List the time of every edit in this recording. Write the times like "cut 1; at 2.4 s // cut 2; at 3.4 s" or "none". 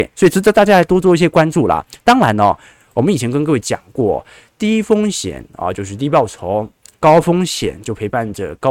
none

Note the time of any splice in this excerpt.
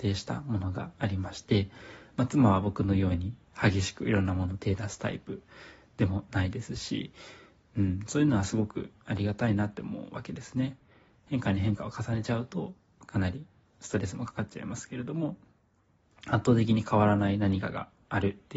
none

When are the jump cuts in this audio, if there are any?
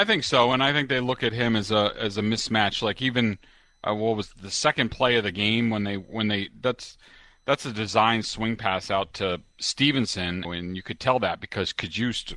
cut 1; at 10.4 s

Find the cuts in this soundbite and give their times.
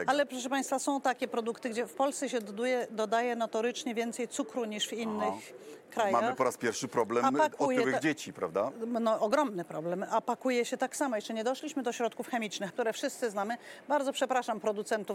cut 1; at 12.7 s

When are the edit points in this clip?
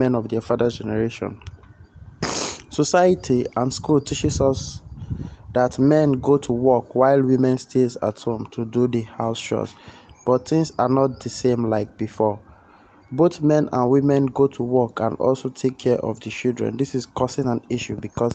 none

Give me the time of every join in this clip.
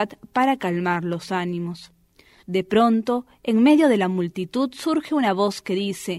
cut 1; at 2.4 s

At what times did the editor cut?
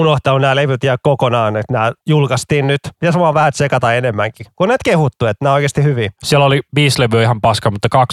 none

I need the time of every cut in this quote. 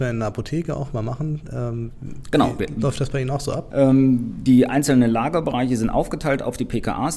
cut 1; at 3.7 s

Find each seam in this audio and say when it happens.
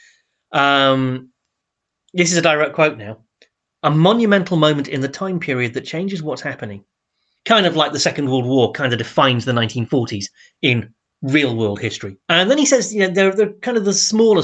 cut 1; at 7.4 s // cut 2; at 12.2 s

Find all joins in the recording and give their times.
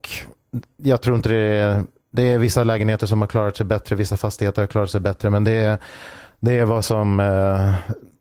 none

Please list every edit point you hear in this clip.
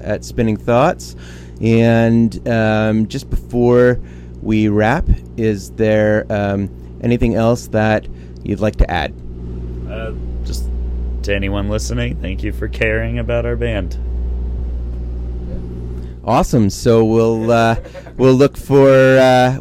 none

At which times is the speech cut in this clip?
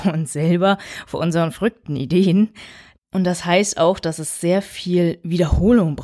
cut 1; at 2.9 s

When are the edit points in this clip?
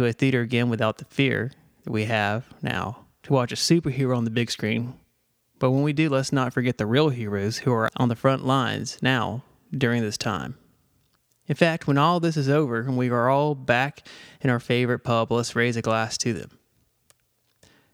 none

